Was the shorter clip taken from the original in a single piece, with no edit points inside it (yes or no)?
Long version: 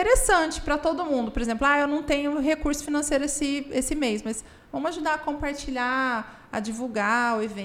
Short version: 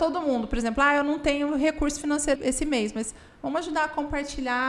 no